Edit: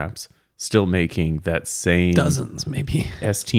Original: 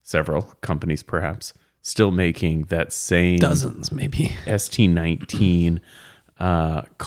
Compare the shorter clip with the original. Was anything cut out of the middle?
no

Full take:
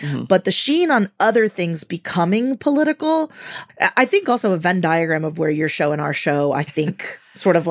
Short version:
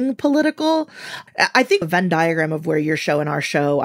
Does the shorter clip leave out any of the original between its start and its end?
yes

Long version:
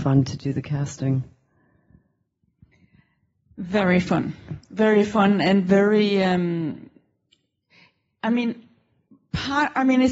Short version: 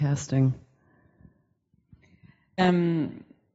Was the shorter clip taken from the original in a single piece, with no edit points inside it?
no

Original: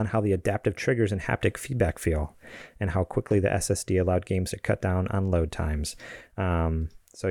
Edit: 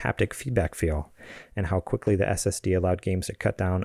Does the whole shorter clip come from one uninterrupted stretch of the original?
yes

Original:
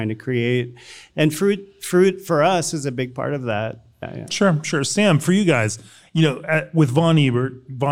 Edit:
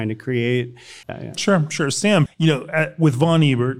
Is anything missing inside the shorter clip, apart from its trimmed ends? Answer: yes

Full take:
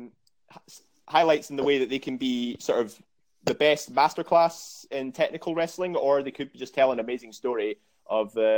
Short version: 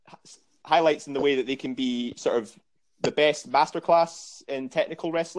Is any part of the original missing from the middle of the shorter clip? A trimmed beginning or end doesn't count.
no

